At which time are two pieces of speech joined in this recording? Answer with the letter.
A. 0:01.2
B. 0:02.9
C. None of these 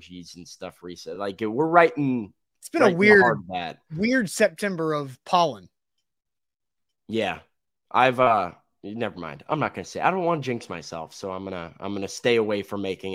C